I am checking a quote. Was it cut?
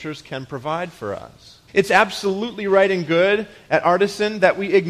yes; 1 cut; at 1.7 s

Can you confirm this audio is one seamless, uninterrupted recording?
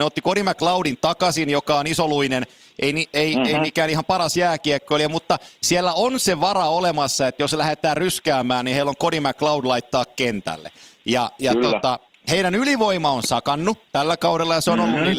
yes; 0 cuts

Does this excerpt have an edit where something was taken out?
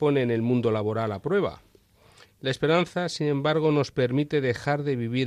yes; 1 cut; at 2.2 s

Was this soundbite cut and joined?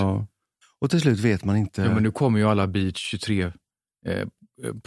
no; 0 cuts

